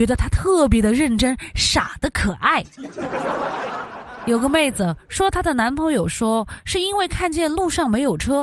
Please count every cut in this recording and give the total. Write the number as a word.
one